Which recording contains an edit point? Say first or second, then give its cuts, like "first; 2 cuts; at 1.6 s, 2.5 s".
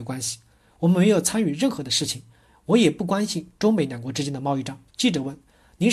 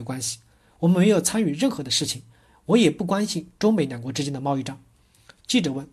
first; 1 cut; at 4.9 s